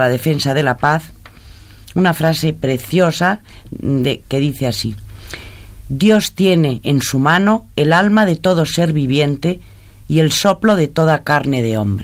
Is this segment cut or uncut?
cut